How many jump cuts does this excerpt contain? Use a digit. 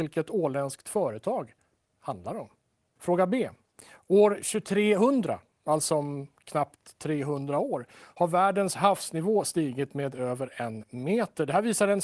1